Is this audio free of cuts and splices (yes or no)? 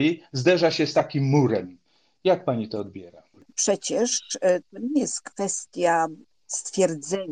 yes